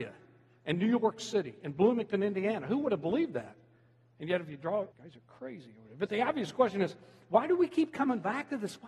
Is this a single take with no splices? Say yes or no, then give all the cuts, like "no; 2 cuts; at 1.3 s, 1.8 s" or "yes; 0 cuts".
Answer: no; 1 cut; at 4.9 s